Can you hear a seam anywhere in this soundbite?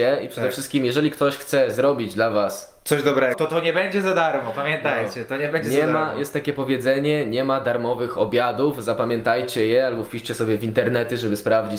yes; 1 cut; at 3.3 s

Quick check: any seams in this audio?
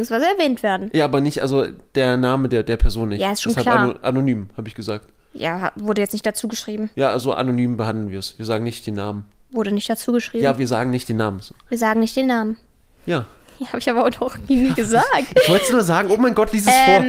no; 0 cuts

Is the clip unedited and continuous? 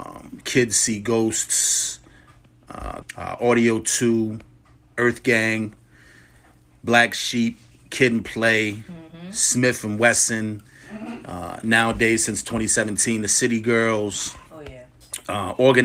no; 2 cuts; at 3.0 s, 14.5 s

